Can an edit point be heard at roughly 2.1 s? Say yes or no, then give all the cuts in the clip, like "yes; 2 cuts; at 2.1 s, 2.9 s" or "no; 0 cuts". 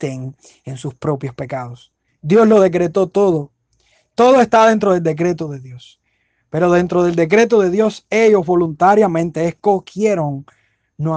yes; 1 cut; at 2.1 s